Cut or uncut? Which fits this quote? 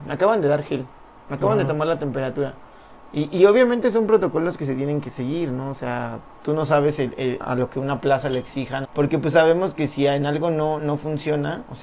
cut